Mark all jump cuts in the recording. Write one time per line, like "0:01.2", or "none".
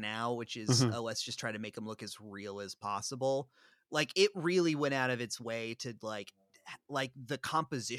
none